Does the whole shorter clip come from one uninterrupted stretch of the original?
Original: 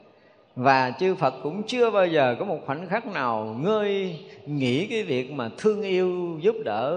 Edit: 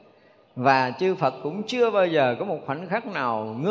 yes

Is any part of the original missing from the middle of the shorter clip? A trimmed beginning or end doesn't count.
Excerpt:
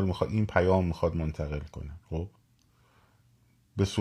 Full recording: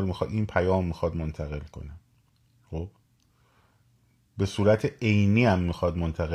yes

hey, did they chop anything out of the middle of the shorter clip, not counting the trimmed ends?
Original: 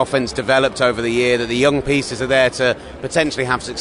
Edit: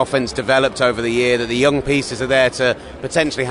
no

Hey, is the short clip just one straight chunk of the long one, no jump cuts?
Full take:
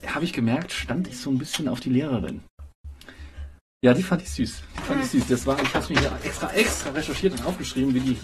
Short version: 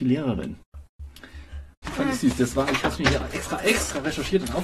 no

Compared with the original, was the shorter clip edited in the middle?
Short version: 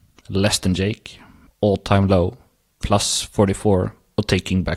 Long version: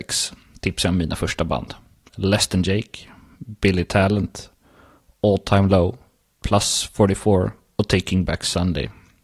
yes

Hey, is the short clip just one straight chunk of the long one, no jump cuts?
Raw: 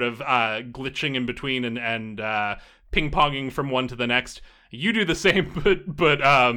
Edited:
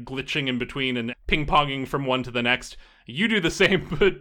no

